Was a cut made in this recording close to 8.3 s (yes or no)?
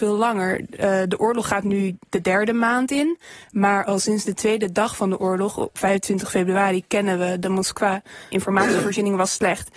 yes